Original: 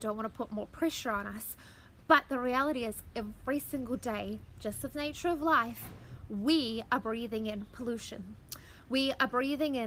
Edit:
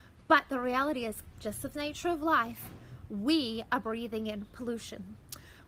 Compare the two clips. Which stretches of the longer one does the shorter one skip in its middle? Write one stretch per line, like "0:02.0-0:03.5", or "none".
0:03.1-0:04.5